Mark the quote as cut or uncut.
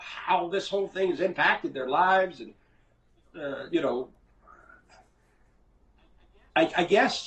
uncut